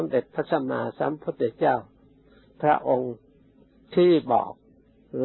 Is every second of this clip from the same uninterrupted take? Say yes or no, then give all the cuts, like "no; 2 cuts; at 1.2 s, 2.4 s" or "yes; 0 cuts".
yes; 0 cuts